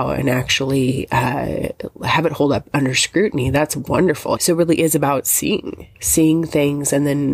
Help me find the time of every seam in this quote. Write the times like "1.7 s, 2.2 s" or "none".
4.4 s, 5.9 s